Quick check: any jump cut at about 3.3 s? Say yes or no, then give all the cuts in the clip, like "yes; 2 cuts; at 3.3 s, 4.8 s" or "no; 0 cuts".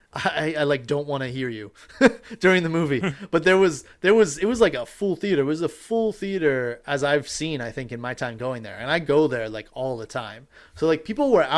no; 0 cuts